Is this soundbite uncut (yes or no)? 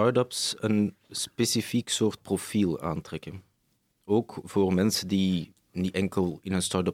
yes